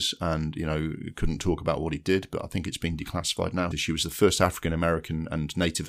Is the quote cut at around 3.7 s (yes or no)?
yes